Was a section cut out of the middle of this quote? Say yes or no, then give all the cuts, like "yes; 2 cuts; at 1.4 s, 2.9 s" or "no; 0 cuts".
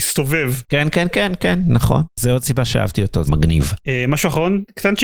yes; 2 cuts; at 2.1 s, 3.3 s